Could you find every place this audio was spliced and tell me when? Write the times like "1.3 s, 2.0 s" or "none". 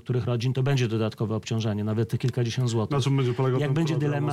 none